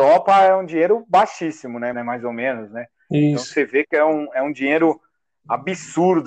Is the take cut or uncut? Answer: cut